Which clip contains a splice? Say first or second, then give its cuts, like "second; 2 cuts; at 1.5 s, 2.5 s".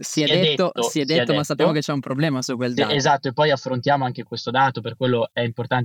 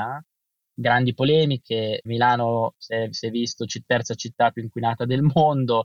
second; 1 cut; at 2.1 s